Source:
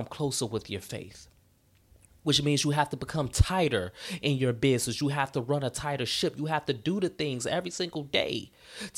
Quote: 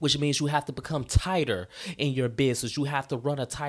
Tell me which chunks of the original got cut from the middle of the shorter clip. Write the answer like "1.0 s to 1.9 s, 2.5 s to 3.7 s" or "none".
none